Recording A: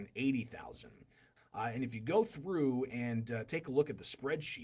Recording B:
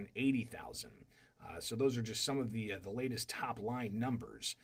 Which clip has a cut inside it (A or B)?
A